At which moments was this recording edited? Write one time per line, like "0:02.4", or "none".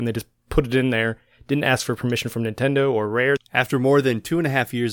0:03.4